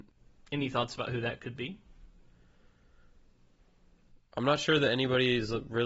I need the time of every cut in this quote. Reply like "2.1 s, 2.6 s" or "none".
none